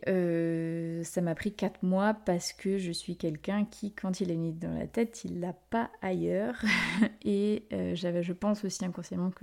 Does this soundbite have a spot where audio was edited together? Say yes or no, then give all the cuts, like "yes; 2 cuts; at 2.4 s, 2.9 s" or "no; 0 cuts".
no; 0 cuts